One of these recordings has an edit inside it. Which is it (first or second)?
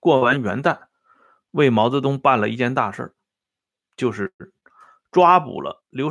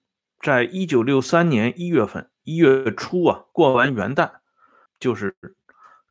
second